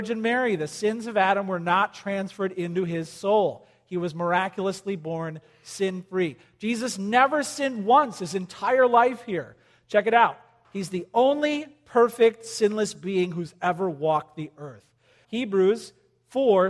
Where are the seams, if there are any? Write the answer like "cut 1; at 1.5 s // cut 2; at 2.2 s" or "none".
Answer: cut 1; at 10.6 s // cut 2; at 15.2 s